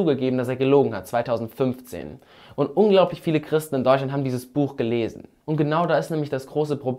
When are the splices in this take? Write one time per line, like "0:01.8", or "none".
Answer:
none